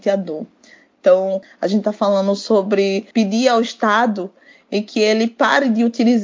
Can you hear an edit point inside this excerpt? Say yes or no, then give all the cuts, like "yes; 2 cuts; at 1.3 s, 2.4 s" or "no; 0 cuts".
yes; 2 cuts; at 1.4 s, 3.1 s